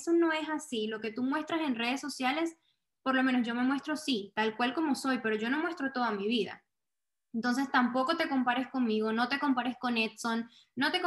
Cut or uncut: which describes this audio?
uncut